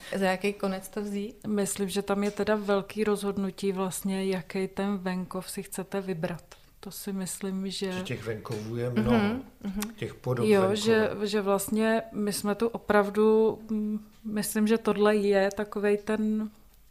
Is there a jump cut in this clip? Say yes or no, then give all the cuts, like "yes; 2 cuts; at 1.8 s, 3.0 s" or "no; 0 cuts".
no; 0 cuts